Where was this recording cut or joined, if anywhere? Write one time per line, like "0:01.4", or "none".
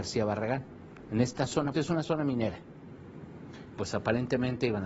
0:01.7
0:03.8